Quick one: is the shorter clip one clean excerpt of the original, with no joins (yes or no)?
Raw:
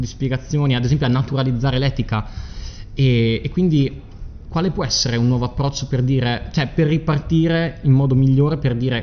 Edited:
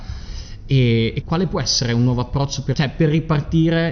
no